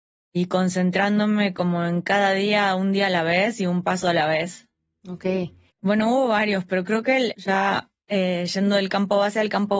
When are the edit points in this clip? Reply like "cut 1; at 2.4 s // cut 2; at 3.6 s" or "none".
cut 1; at 5.7 s // cut 2; at 7.3 s